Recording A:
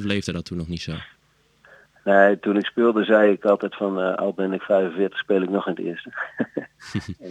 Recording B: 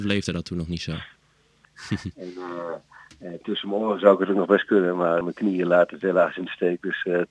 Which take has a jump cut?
B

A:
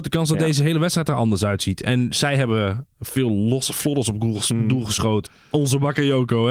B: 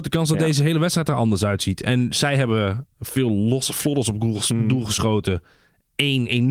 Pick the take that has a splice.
A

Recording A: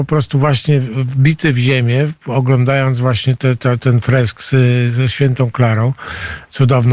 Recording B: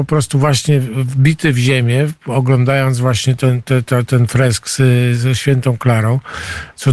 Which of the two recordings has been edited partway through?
A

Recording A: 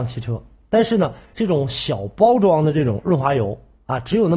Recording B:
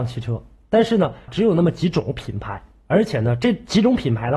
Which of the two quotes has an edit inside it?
B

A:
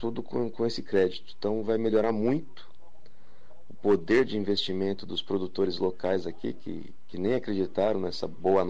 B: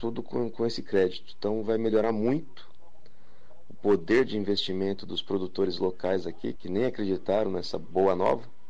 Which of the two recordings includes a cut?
B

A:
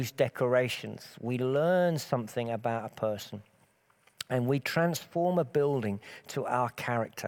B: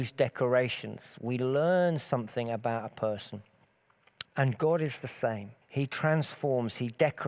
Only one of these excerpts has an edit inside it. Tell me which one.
B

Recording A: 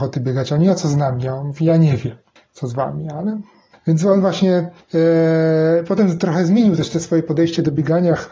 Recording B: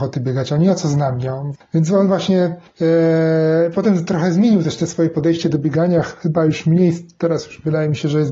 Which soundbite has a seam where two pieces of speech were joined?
B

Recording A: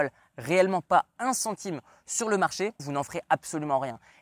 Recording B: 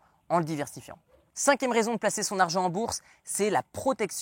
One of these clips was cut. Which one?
A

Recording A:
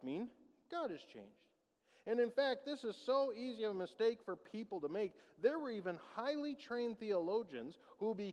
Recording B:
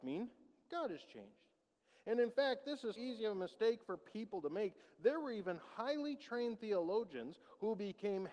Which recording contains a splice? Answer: B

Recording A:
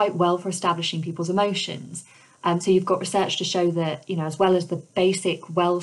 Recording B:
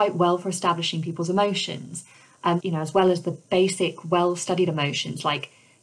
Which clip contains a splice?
B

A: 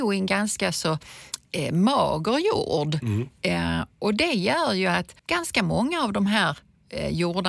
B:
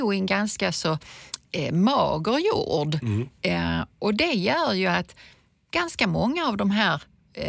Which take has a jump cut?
A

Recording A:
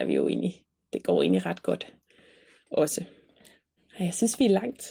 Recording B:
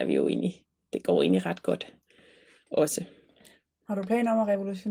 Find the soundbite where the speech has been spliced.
A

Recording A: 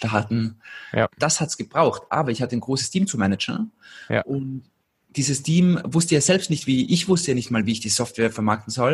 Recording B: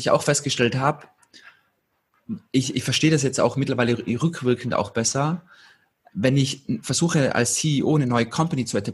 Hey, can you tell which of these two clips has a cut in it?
A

